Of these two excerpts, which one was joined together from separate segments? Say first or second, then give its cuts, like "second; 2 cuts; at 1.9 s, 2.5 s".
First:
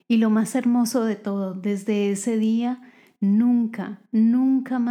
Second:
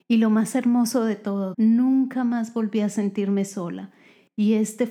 second; 1 cut; at 1.5 s